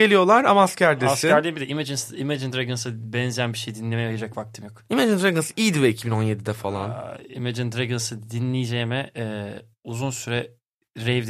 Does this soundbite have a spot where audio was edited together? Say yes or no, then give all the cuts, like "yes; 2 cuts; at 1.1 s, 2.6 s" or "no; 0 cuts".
no; 0 cuts